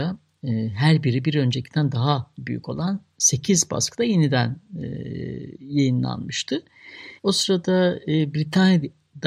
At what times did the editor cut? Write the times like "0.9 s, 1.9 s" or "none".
7.2 s